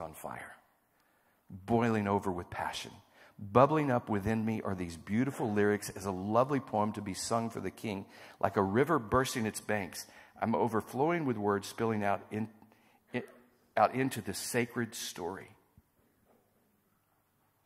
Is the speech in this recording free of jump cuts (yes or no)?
yes